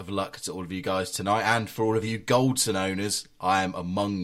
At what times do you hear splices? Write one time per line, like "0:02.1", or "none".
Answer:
none